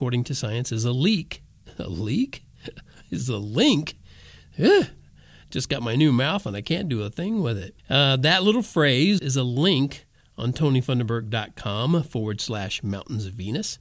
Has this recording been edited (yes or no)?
yes